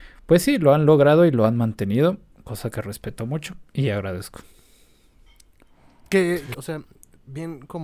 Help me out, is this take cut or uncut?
cut